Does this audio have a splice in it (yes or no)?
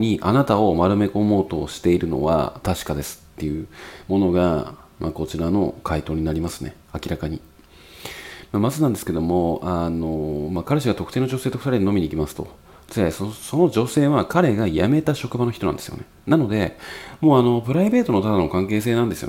no